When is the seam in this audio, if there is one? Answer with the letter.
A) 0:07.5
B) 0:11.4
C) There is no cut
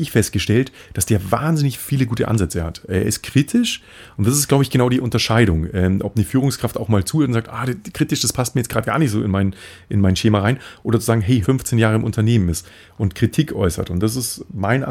B